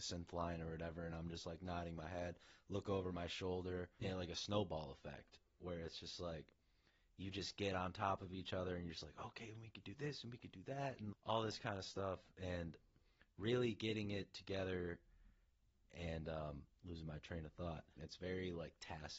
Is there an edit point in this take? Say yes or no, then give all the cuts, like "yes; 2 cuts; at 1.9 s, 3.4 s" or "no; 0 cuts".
yes; 3 cuts; at 4.0 s, 11.1 s, 18.0 s